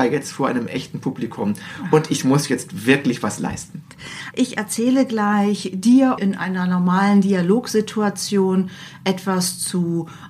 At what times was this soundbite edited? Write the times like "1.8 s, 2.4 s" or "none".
4.3 s, 6.2 s